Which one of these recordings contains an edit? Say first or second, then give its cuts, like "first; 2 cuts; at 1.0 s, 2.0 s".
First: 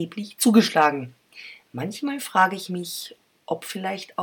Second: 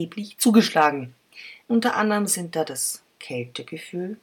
second; 1 cut; at 1.6 s